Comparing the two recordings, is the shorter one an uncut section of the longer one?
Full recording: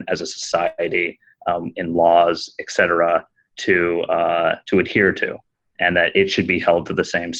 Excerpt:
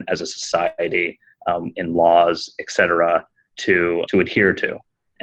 no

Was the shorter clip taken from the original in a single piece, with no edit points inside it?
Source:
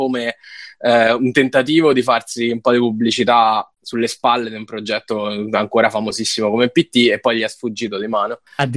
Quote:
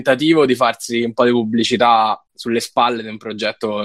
yes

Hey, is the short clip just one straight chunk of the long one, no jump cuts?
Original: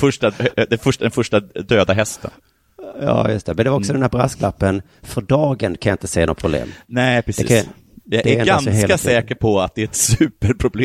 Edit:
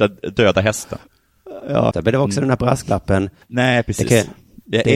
no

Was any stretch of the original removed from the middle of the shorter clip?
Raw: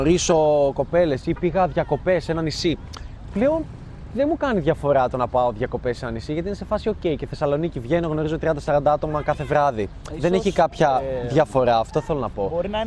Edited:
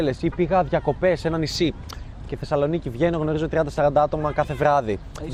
yes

